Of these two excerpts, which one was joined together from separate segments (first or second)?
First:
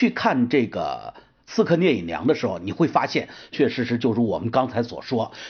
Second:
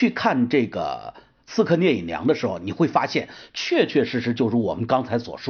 first